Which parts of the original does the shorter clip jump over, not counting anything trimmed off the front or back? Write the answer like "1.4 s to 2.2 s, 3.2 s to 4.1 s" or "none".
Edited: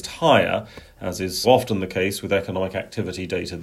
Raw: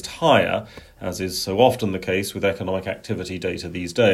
1.4 s to 1.6 s